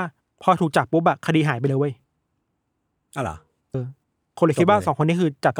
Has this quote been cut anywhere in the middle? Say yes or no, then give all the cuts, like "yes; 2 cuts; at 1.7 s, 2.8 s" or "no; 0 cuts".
yes; 1 cut; at 3.7 s